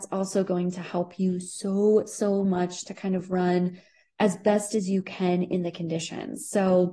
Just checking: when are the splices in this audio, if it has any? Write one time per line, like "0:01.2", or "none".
none